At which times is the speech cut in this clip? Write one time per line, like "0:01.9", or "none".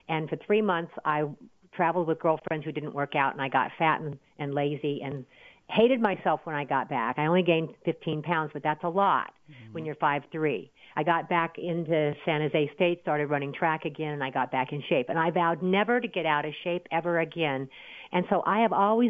none